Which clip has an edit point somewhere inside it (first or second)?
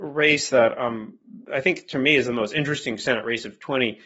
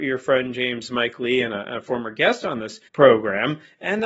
second